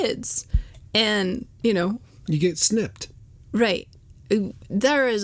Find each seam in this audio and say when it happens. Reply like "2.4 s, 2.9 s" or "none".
none